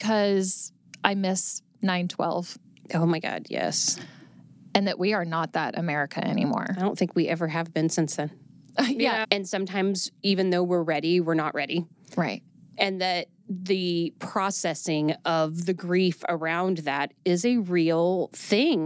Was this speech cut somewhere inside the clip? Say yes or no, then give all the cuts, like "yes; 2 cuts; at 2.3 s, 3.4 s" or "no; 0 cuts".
yes; 1 cut; at 9.2 s